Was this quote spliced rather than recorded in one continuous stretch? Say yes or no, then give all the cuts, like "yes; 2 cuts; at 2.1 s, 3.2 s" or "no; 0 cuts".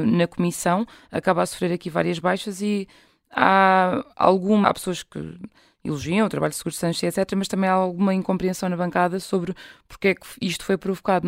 yes; 1 cut; at 4.6 s